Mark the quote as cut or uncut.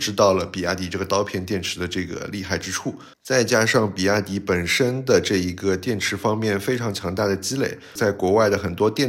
cut